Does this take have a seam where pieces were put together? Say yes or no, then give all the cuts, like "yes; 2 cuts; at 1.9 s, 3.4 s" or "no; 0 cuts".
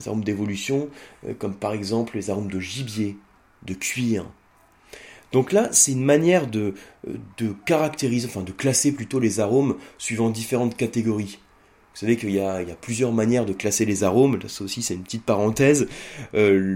no; 0 cuts